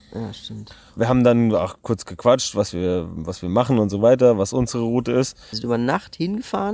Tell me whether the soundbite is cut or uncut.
cut